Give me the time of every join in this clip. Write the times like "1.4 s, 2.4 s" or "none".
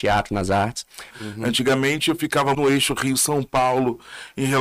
1.1 s, 2.5 s